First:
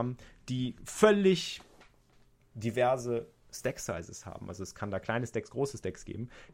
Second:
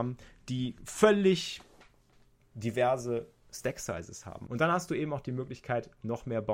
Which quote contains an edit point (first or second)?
second